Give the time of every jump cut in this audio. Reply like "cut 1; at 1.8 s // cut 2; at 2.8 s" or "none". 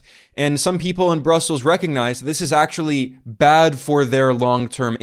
none